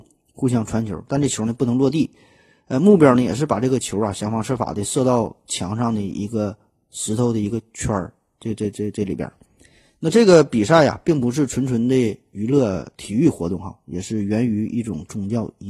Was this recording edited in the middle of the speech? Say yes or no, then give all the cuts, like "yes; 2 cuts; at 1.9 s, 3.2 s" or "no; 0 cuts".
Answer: no; 0 cuts